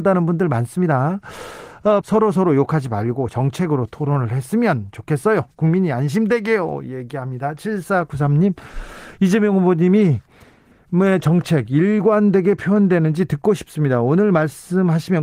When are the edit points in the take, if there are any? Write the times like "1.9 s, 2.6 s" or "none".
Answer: 2.0 s